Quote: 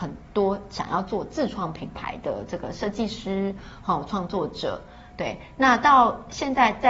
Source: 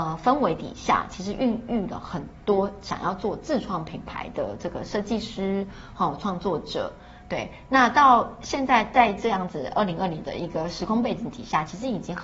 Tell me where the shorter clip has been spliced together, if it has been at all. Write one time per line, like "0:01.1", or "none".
none